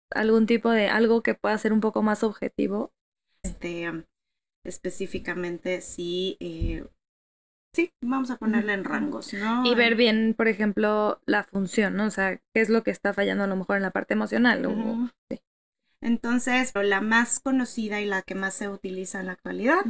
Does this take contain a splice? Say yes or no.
yes